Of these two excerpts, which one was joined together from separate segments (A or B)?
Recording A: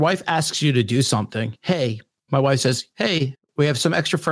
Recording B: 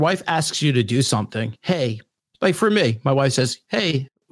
A